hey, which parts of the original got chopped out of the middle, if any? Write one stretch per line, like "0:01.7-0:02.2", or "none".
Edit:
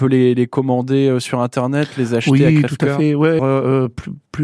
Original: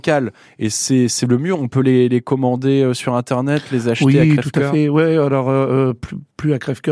0:05.1-0:05.4